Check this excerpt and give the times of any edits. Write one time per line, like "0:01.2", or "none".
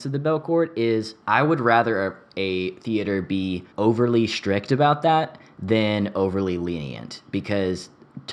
0:01.2
0:03.7

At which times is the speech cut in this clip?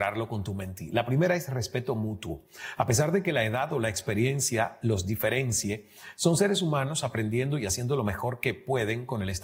none

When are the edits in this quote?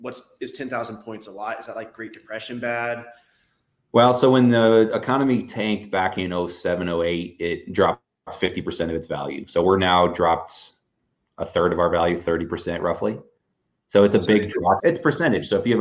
0:14.8

